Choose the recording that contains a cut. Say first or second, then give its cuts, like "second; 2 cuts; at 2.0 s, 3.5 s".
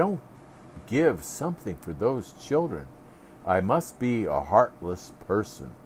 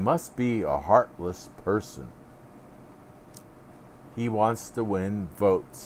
second; 1 cut; at 4.0 s